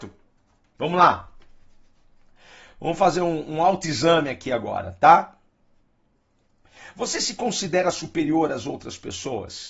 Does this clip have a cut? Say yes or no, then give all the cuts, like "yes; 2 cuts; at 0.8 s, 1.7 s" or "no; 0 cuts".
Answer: no; 0 cuts